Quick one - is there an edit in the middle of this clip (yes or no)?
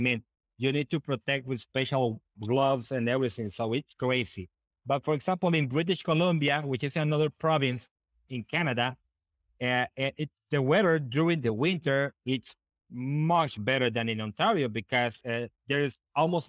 no